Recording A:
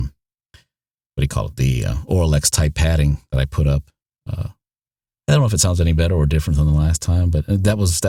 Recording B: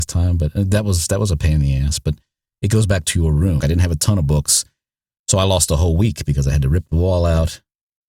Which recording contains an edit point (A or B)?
B